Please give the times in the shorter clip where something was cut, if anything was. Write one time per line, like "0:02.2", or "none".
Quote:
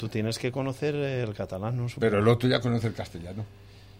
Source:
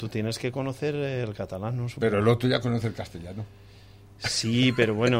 none